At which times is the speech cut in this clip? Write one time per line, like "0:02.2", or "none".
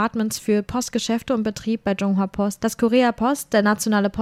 0:02.6